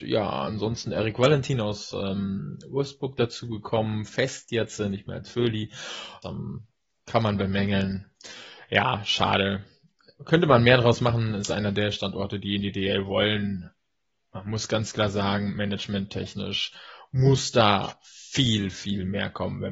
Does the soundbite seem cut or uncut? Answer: cut